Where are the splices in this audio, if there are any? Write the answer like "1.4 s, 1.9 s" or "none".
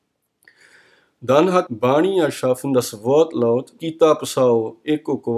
1.7 s, 3.8 s